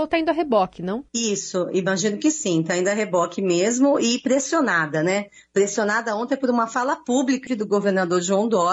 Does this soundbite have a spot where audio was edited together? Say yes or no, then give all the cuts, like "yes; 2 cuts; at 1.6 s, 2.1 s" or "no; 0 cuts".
yes; 2 cuts; at 1.1 s, 7.5 s